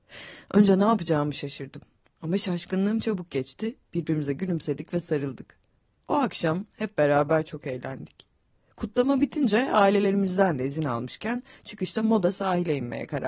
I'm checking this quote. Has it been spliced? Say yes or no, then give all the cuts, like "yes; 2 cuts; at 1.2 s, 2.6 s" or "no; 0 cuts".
no; 0 cuts